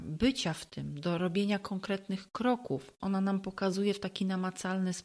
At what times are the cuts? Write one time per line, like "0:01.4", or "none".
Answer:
0:03.0